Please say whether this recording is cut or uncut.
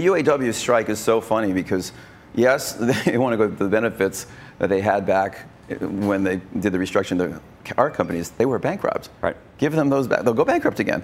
uncut